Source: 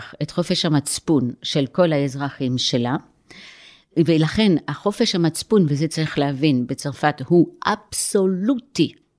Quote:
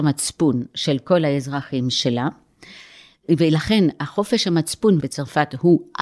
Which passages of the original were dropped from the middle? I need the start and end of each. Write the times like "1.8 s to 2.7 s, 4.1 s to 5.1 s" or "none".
5.7 s to 6.7 s